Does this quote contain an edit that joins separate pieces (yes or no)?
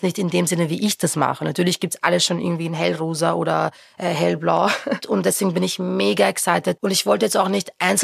yes